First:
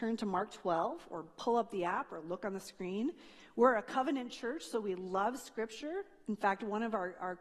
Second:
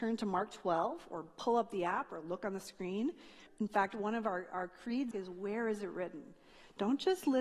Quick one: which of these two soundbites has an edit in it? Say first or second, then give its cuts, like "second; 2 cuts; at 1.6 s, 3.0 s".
second; 2 cuts; at 3.5 s, 5.1 s